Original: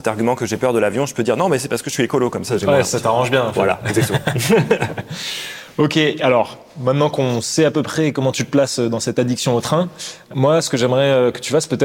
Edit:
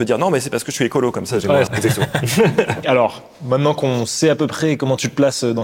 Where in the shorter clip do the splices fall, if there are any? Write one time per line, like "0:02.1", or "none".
0:01.7
0:02.8

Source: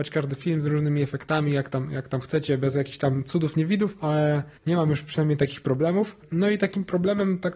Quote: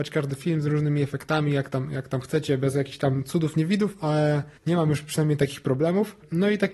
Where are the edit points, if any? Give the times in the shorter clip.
none

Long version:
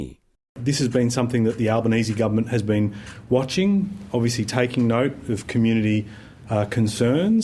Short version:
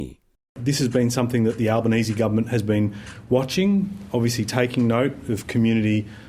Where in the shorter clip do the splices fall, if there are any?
none

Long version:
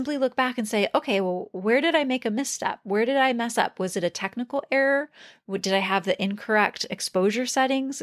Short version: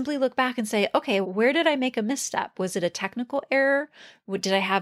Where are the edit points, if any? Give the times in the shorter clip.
0:01.2
0:02.5

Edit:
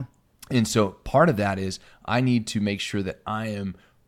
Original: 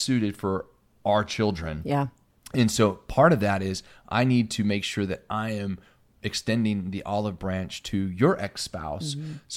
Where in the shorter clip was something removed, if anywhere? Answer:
none

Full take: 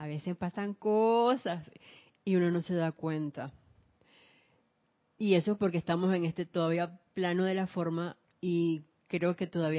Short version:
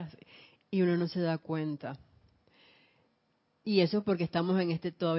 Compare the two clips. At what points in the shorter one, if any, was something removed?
none

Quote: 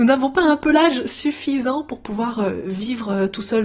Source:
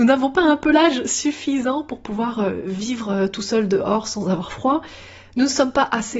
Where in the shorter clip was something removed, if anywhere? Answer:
none

